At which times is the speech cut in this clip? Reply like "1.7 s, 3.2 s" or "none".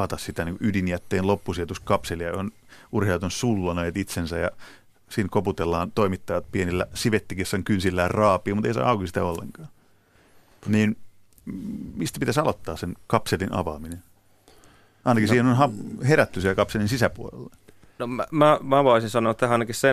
none

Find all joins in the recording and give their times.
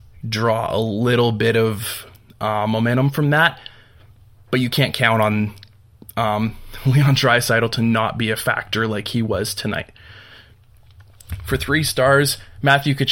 none

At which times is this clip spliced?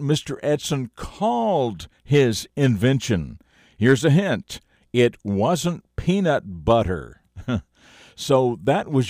none

